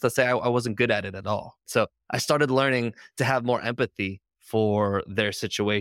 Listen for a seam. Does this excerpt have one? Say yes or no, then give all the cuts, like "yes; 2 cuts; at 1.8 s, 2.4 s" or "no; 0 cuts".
yes; 1 cut; at 1.7 s